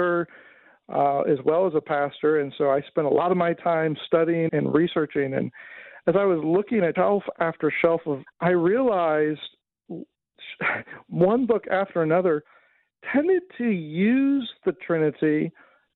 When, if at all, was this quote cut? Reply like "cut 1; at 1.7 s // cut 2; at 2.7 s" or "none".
cut 1; at 4.5 s // cut 2; at 6.9 s // cut 3; at 8.3 s